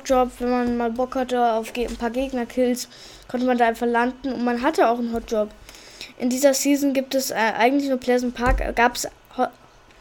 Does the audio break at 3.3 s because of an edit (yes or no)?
no